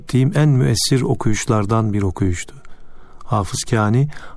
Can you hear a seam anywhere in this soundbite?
no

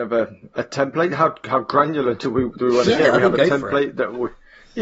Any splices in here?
no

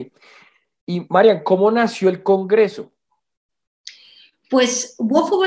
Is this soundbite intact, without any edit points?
yes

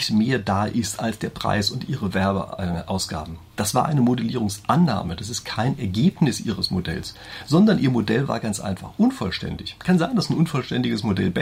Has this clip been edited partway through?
no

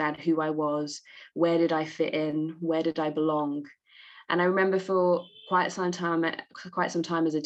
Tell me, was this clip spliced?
no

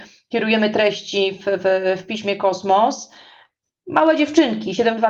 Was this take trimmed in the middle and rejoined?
no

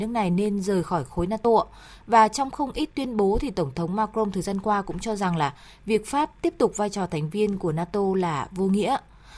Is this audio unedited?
yes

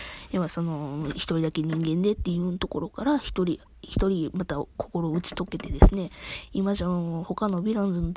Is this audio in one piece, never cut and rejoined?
yes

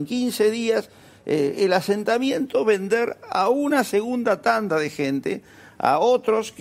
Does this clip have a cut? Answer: no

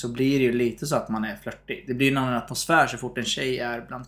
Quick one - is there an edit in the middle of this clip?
no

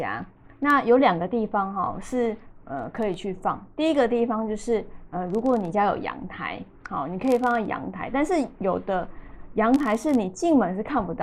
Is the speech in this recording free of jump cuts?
yes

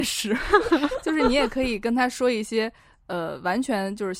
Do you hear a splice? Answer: no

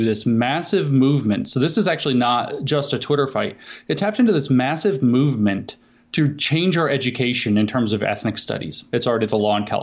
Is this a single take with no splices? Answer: no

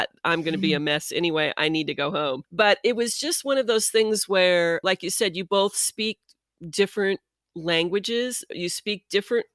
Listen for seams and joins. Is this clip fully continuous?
yes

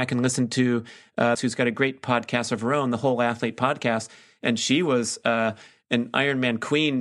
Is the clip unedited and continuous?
no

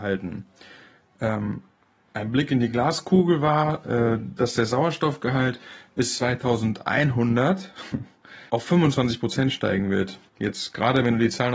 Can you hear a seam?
yes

